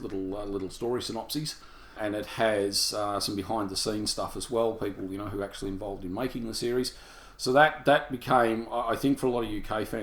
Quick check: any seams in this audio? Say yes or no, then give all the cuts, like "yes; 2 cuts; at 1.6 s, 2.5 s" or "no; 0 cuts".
no; 0 cuts